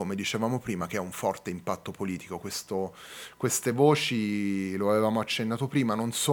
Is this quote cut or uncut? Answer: uncut